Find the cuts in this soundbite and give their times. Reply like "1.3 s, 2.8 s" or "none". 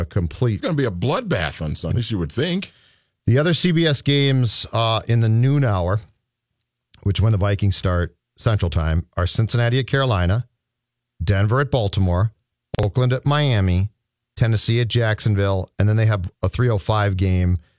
1.9 s